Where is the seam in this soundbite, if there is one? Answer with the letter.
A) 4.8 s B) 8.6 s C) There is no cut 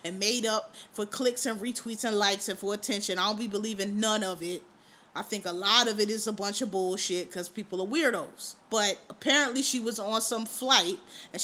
B